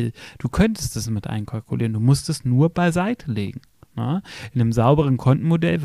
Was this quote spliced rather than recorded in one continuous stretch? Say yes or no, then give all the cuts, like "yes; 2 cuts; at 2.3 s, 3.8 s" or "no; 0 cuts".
no; 0 cuts